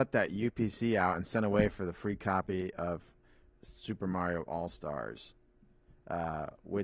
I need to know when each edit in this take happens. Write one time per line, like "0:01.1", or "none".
none